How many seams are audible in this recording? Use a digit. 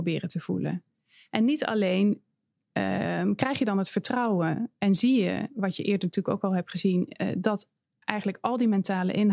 0